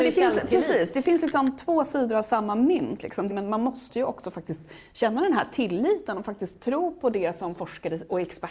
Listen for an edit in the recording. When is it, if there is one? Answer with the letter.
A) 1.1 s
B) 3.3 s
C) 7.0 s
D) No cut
B